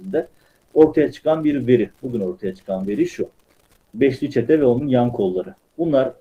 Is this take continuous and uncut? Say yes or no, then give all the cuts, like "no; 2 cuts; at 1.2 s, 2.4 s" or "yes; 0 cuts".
no; 1 cut; at 3.9 s